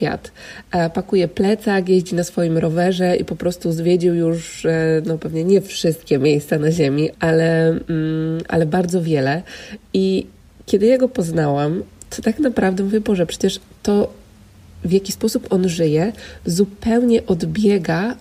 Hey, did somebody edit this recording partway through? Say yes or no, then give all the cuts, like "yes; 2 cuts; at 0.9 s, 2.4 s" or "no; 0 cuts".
yes; 1 cut; at 7.1 s